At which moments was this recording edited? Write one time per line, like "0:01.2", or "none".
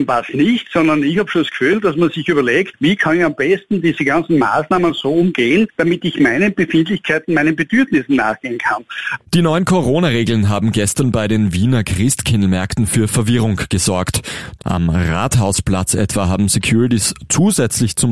0:09.2
0:14.6